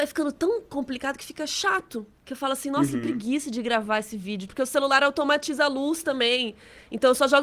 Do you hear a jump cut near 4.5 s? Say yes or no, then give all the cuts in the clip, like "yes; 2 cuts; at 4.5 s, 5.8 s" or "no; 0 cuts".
yes; 1 cut; at 4.5 s